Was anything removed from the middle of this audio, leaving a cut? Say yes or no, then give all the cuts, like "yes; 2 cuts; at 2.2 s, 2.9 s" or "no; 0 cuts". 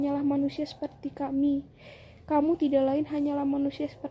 no; 0 cuts